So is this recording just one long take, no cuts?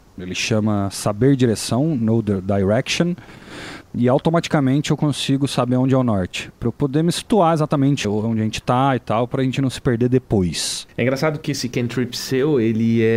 no; 1 cut; at 8.0 s

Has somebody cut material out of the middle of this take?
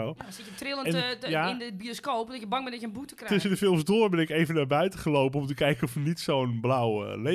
no; 0 cuts

